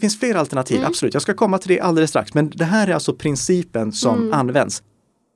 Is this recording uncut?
yes; 0 cuts

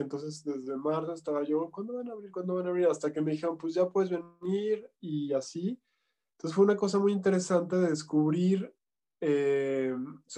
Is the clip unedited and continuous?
yes; 0 cuts

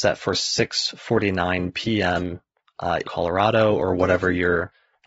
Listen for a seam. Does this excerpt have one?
yes; 1 cut; at 3.0 s

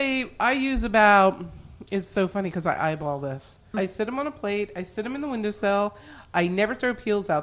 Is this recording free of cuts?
no; 1 cut; at 3.7 s

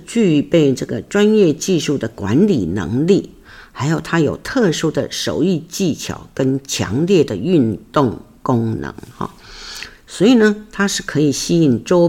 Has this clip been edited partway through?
no; 0 cuts

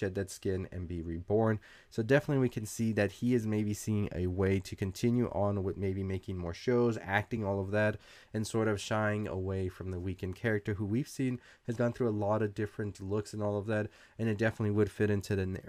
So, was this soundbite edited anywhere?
no; 0 cuts

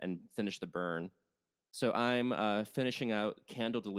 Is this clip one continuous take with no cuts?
yes; 0 cuts

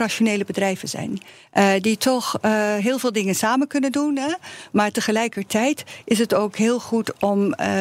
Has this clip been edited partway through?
no; 0 cuts

